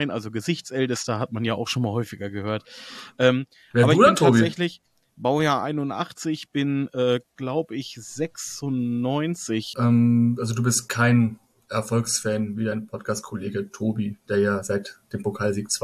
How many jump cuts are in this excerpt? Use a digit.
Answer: 1